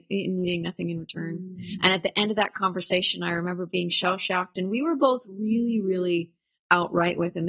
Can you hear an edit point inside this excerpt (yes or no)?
no